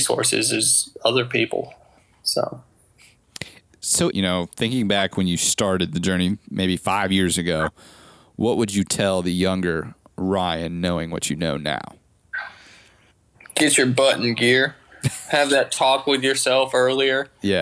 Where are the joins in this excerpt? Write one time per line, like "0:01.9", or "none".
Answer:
0:04.1

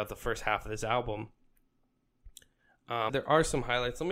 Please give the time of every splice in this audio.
0:03.1

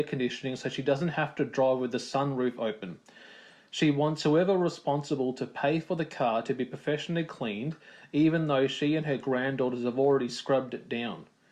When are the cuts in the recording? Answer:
none

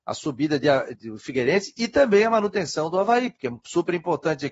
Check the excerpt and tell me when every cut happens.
0:00.9

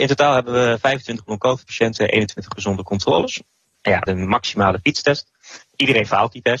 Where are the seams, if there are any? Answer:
0:04.1
0:05.6

